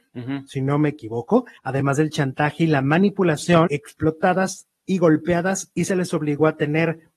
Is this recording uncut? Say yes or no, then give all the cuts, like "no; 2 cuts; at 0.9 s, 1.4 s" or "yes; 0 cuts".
no; 2 cuts; at 1.6 s, 3.7 s